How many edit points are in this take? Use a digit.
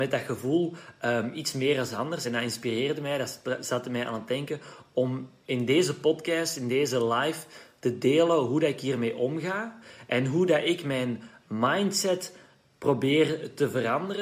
0